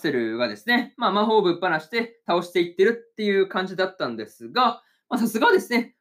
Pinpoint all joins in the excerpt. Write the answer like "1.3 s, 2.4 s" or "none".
none